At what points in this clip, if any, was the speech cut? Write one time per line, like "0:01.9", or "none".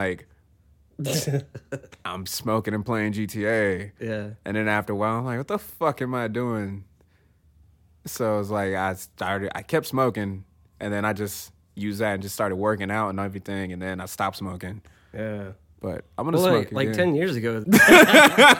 0:17.6